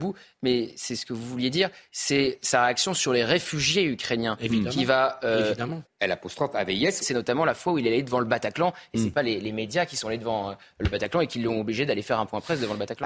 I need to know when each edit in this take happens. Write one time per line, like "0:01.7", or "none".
0:05.8
0:07.0